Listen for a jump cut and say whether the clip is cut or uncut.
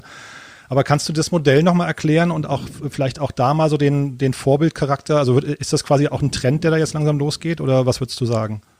uncut